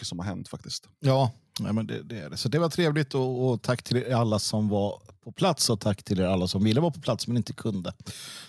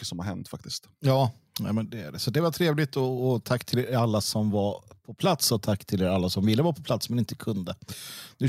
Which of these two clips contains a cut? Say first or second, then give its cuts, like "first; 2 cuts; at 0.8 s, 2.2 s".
second; 1 cut; at 1.9 s